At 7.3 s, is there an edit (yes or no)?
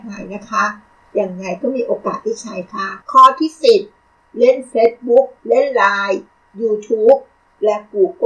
no